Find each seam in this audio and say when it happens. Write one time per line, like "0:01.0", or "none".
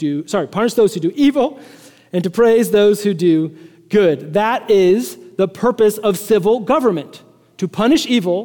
none